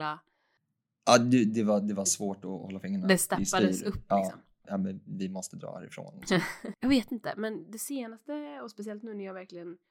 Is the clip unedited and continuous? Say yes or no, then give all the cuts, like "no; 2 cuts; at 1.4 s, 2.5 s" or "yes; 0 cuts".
no; 2 cuts; at 4.6 s, 6.7 s